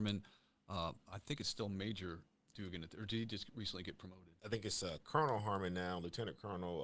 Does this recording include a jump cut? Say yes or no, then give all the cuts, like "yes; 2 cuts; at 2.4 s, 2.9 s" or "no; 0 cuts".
no; 0 cuts